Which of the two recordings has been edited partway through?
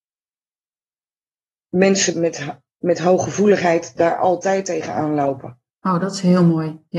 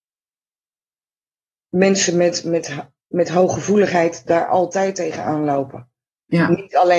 first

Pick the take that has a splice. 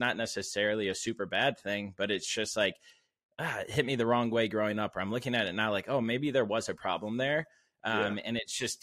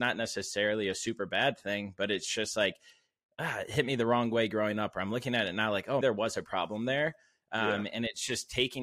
second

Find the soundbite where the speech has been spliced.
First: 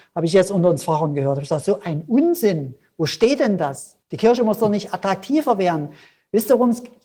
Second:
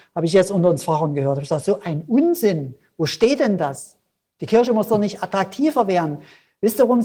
first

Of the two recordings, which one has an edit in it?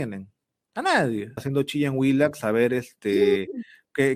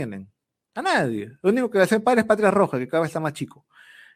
first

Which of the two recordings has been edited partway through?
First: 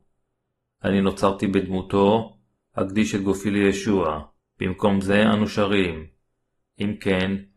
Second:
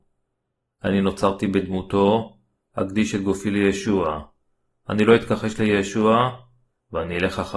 first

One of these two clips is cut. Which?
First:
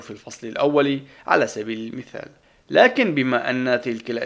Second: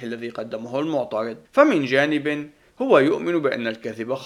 second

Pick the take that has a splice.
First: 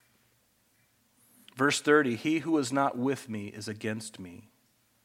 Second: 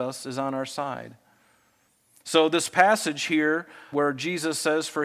second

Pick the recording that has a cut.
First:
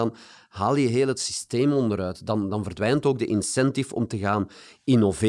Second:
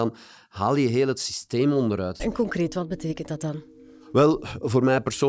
second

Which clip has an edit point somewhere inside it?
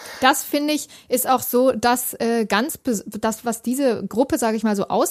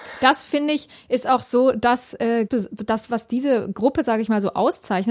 second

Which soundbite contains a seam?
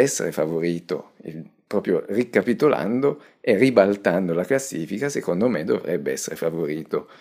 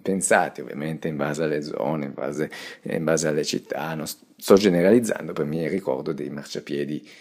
second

